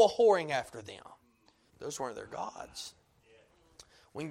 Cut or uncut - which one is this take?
cut